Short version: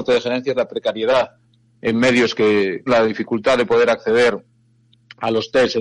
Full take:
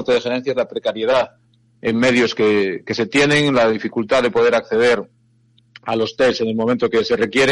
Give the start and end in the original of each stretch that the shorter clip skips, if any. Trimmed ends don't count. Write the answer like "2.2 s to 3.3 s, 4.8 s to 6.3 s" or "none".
2.9 s to 3.5 s